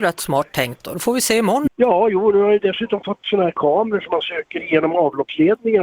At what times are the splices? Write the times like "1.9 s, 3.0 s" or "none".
1.7 s